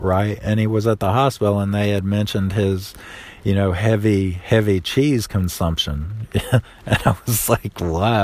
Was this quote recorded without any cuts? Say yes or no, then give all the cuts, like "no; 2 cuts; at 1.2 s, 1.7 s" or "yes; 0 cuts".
yes; 0 cuts